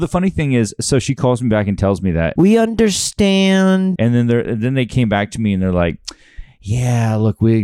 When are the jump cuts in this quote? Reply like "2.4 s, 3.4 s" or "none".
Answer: 2.4 s, 4.0 s